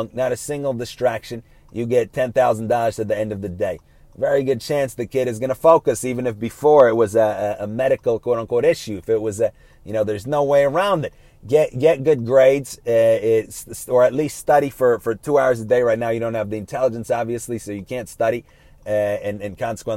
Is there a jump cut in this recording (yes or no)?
no